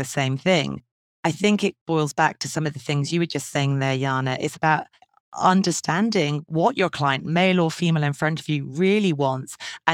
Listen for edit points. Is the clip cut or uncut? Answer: uncut